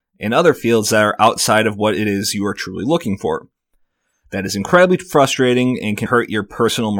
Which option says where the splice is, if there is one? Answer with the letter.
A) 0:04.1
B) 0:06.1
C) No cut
B